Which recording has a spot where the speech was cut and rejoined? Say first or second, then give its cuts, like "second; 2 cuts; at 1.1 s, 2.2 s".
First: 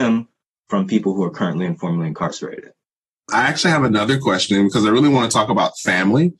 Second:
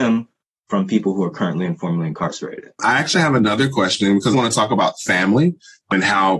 second; 2 cuts; at 2.7 s, 4.3 s